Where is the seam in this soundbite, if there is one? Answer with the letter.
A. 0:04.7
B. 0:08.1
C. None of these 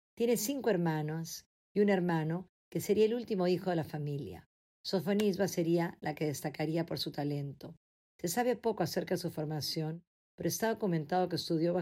A